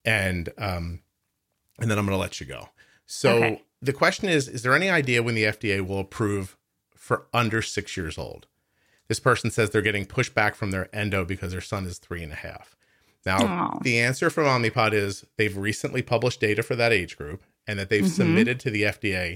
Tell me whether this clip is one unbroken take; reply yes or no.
yes